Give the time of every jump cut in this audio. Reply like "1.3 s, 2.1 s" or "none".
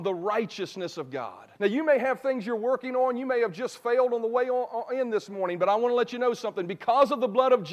1.6 s